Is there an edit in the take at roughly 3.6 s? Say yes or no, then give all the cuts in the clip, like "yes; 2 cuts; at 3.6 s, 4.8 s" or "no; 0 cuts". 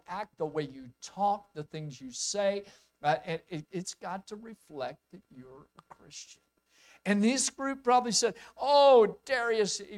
yes; 1 cut; at 3.6 s